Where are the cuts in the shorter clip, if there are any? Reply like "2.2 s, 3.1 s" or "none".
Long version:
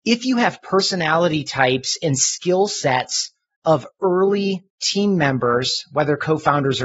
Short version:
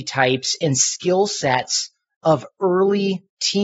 none